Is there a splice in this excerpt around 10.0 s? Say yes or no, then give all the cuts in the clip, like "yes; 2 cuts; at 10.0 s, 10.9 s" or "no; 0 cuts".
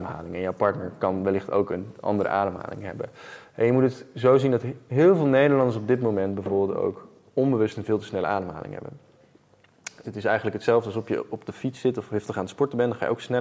yes; 1 cut; at 10.0 s